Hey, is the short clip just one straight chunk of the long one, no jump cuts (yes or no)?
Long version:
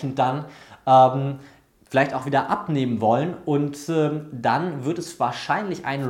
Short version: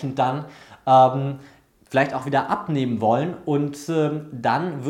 yes